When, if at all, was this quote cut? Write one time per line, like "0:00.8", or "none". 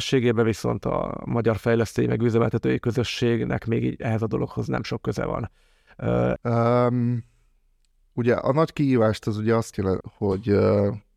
0:06.4
0:10.0